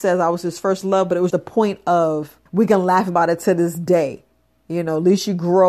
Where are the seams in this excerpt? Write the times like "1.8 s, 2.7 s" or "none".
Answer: 1.3 s, 2.5 s